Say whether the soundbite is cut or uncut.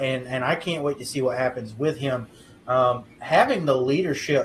uncut